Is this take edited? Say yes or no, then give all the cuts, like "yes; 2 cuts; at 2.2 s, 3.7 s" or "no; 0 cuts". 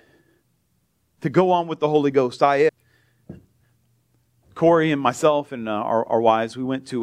yes; 2 cuts; at 2.7 s, 4.4 s